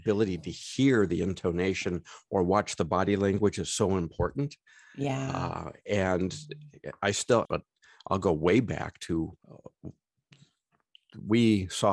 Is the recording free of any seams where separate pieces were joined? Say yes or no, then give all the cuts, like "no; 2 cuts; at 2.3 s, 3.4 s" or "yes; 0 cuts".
no; 2 cuts; at 7.4 s, 9.4 s